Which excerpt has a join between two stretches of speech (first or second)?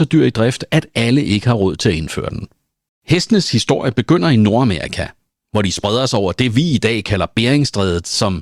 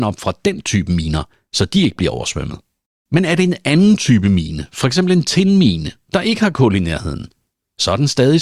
first